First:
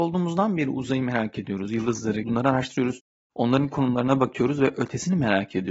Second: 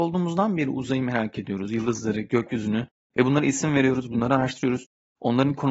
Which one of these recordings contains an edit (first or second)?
first